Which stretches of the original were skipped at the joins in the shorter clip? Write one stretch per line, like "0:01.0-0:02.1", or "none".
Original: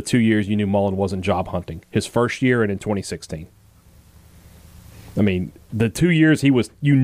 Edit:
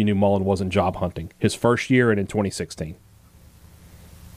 none

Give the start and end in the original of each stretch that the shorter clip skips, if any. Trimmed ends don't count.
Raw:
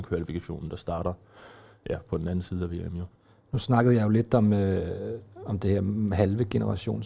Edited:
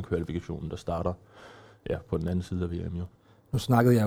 none

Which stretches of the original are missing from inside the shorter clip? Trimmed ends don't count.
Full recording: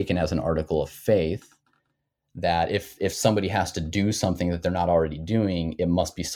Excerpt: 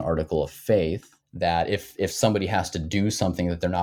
0:01.6-0:02.2

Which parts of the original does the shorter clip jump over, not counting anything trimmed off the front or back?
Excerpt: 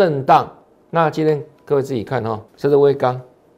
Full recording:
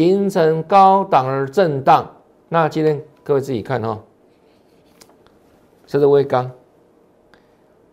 0:04.1-0:05.8

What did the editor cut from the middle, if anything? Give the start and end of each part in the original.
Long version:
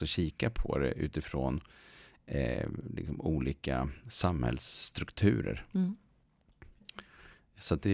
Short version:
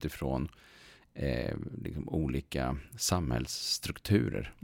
none

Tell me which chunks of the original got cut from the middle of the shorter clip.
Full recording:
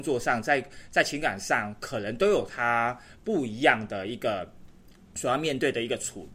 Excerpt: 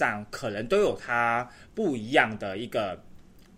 none

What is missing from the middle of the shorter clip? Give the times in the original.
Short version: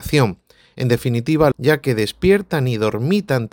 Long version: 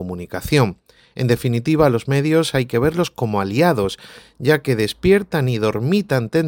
0:01.9-0:04.3

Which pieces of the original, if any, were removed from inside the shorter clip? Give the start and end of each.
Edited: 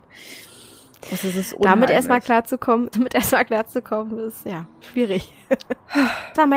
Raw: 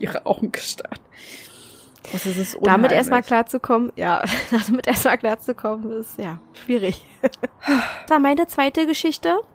0:03.9-0:04.7

